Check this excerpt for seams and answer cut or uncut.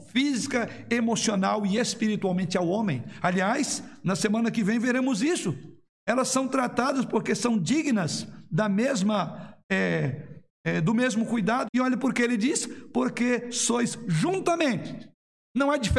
cut